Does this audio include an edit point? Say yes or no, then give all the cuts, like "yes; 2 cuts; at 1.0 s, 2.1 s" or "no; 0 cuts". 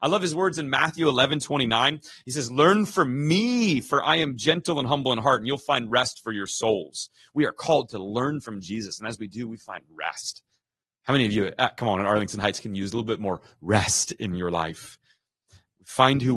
no; 0 cuts